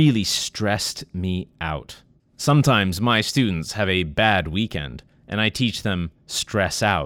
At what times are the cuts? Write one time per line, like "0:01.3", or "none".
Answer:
0:02.2